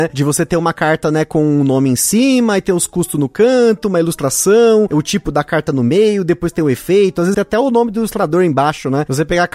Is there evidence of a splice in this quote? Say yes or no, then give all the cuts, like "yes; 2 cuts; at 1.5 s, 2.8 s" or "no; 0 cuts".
yes; 1 cut; at 7.3 s